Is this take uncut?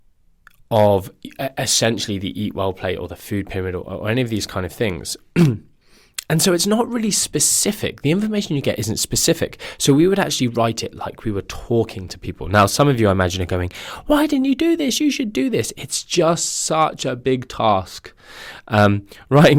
yes; 0 cuts

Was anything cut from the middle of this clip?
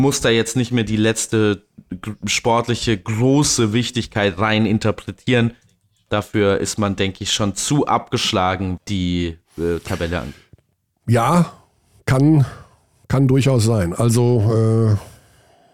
yes; 1 cut; at 8.8 s

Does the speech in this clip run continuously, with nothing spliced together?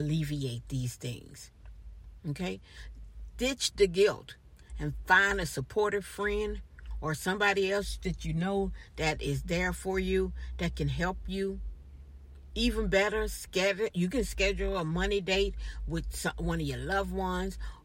yes; 0 cuts

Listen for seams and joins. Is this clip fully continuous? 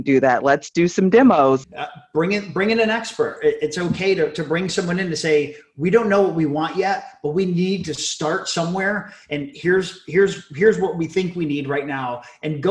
no; 1 cut; at 1.6 s

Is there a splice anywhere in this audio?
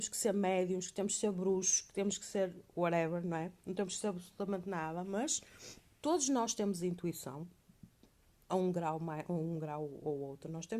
no; 0 cuts

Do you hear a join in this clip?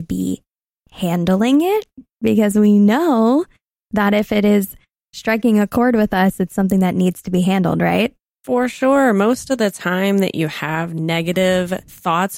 no; 0 cuts

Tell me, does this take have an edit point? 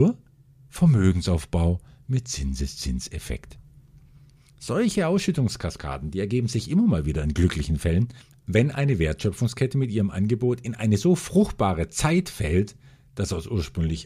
no; 0 cuts

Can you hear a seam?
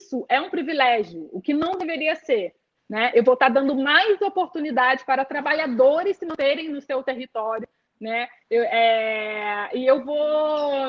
yes; 1 cut; at 2.8 s

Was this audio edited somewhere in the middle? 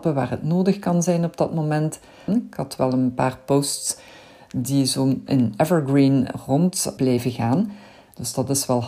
yes; 2 cuts; at 2.3 s, 7.0 s

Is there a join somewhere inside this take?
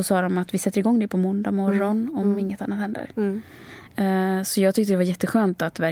no; 0 cuts

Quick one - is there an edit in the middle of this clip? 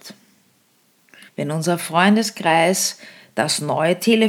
yes; 1 cut; at 1.3 s

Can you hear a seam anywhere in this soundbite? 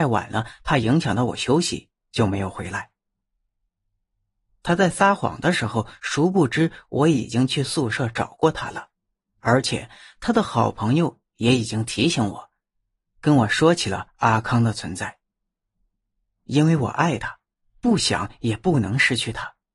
no; 0 cuts

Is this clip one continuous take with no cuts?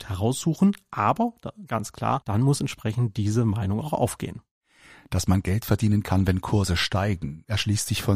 yes; 0 cuts

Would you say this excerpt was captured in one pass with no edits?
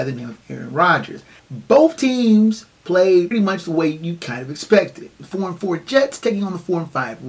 no; 3 cuts; at 1.4 s, 3.3 s, 5.2 s

